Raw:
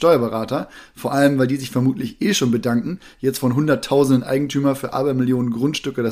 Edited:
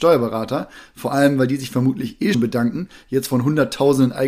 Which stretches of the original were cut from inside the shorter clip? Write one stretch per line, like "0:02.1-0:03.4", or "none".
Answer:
0:02.3-0:02.5